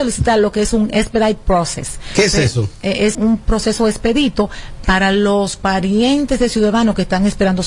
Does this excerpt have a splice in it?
yes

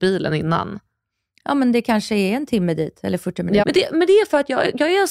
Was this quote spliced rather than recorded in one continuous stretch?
yes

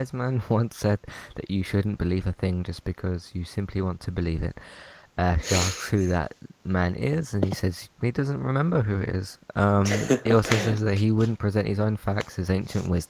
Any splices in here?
no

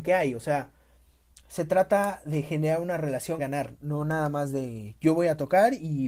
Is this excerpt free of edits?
no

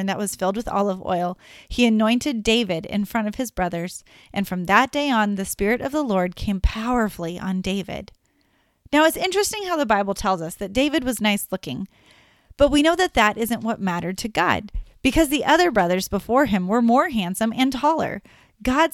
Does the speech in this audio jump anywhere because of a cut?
no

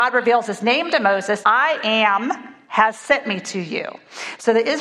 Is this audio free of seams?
no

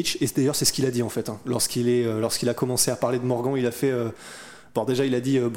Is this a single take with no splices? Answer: yes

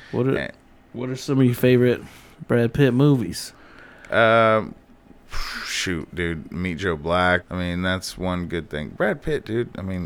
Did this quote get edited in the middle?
yes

